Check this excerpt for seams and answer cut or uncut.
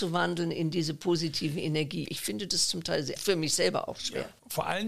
cut